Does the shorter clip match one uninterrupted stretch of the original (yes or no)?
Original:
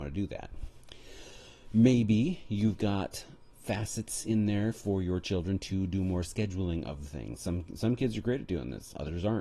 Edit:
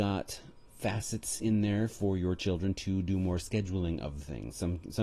yes